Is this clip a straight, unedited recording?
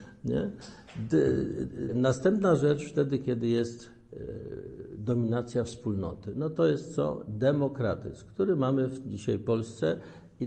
no; 1 cut; at 1.9 s

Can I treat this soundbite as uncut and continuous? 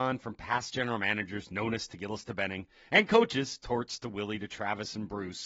yes; 0 cuts

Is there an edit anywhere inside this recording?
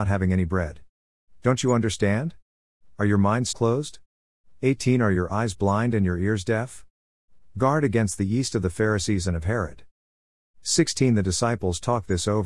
yes; 2 cuts; at 3.5 s, 7.4 s

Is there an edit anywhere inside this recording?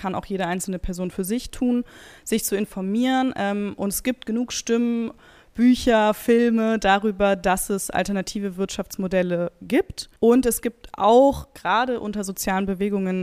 yes; 1 cut; at 10.2 s

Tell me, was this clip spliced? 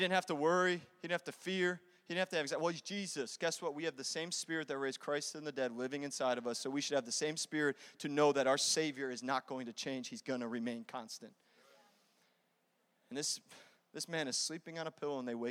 no; 0 cuts

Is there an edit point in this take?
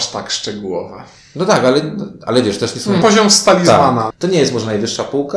yes; 2 cuts; at 3.0 s, 4.1 s

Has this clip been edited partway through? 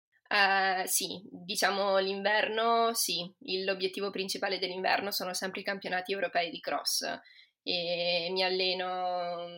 no; 0 cuts

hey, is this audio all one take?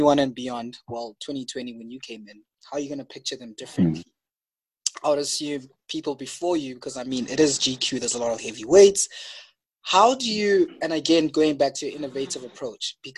yes; 0 cuts

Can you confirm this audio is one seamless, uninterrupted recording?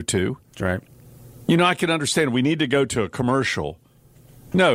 yes; 0 cuts

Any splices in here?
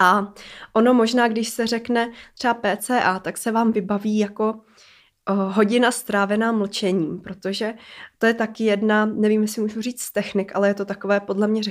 no; 0 cuts

